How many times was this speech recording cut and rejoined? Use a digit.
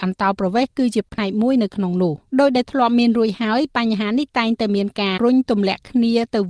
2